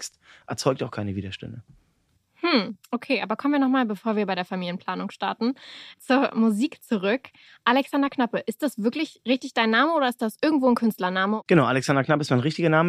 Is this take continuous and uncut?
yes; 0 cuts

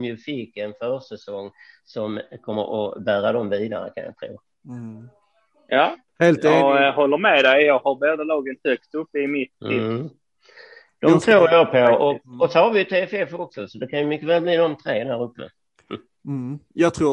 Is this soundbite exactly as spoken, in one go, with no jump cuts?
yes; 0 cuts

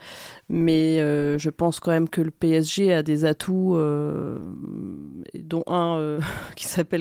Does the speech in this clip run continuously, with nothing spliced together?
yes; 0 cuts

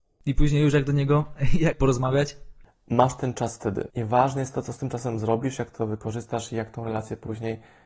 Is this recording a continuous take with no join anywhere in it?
no; 2 cuts; at 1.7 s, 3.9 s

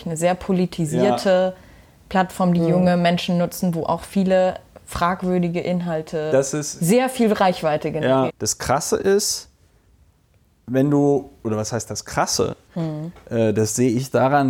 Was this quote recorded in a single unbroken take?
no; 2 cuts; at 8.3 s, 12.7 s

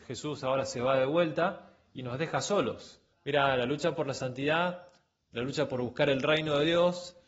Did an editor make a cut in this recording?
yes; 1 cut; at 3.1 s

